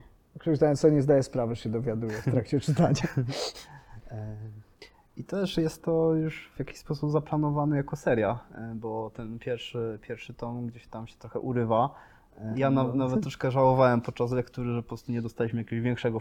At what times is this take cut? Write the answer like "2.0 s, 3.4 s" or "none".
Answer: 12.5 s

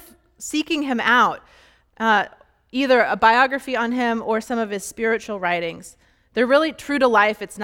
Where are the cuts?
none

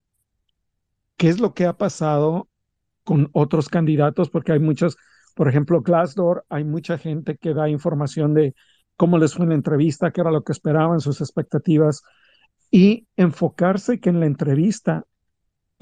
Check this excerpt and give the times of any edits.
none

